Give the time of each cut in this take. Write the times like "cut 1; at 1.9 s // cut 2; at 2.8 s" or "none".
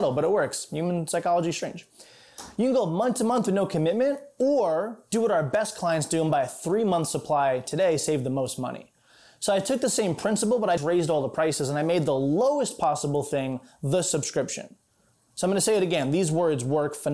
cut 1; at 10.8 s